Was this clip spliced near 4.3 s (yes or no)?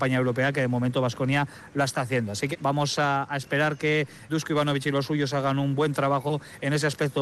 yes